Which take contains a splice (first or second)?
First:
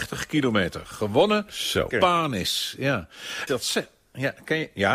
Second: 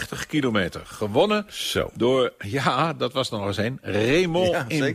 first